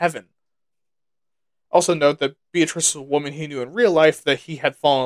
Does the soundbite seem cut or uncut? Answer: cut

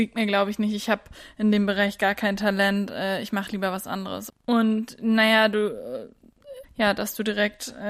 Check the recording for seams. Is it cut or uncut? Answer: cut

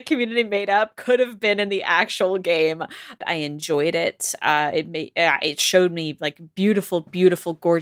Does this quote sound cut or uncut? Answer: cut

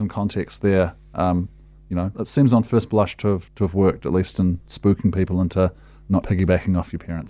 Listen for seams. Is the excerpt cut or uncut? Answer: cut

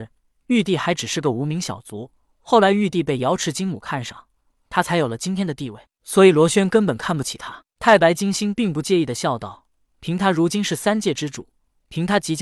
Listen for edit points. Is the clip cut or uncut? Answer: uncut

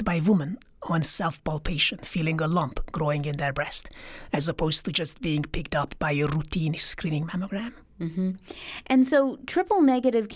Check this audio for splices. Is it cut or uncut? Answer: uncut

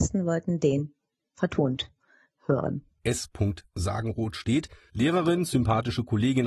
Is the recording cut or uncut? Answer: cut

